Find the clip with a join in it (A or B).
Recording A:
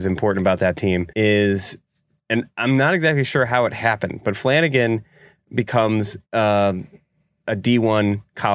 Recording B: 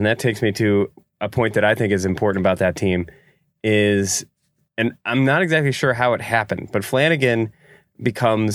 A